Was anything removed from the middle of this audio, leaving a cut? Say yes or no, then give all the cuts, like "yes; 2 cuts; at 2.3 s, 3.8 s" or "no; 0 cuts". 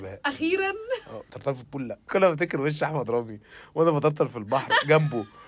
no; 0 cuts